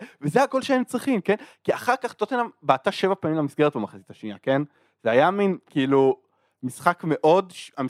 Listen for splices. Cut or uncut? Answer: uncut